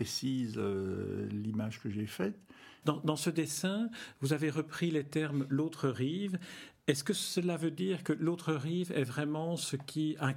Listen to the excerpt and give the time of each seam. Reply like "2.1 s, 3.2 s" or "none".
2.8 s